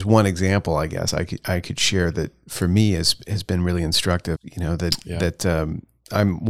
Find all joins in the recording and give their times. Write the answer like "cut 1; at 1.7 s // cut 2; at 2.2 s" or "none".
cut 1; at 4.4 s